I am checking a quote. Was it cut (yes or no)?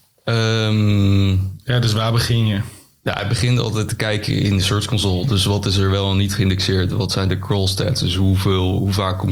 no